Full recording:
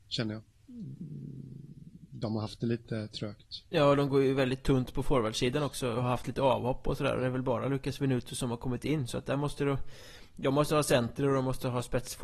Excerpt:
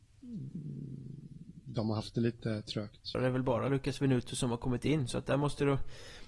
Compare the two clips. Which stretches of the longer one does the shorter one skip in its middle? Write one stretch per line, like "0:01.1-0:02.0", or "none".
0:03.6-0:07.1